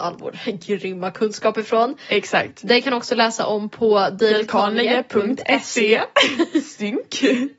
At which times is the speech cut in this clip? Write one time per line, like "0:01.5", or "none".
none